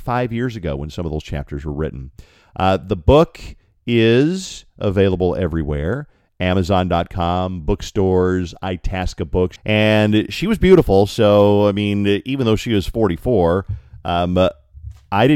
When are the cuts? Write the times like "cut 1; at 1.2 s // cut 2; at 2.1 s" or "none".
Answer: cut 1; at 9.6 s

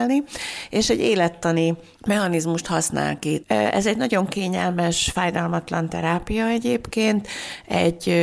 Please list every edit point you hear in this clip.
cut 1; at 3.4 s

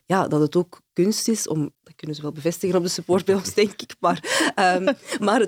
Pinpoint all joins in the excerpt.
cut 1; at 1.7 s

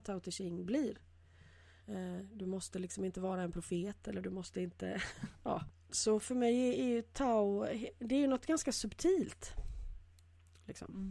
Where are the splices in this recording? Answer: cut 1; at 1.8 s // cut 2; at 5.7 s

